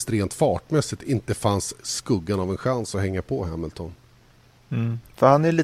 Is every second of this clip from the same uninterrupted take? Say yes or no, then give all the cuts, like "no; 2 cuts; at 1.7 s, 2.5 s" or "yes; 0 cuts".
yes; 0 cuts